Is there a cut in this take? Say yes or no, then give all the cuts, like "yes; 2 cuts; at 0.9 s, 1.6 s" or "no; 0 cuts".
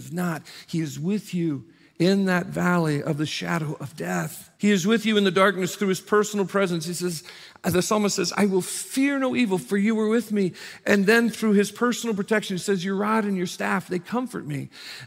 yes; 1 cut; at 4.5 s